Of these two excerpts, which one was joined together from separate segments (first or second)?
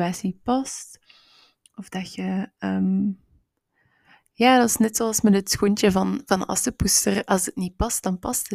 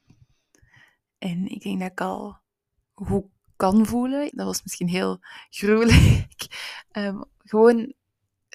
second